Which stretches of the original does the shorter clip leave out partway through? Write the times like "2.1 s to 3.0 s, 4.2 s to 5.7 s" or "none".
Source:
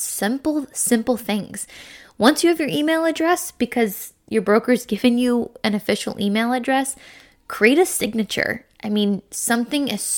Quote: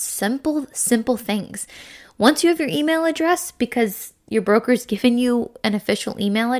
none